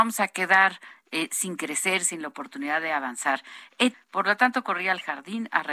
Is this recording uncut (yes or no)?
no